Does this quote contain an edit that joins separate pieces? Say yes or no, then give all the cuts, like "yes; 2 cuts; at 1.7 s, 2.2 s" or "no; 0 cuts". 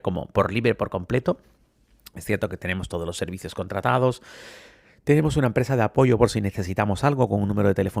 no; 0 cuts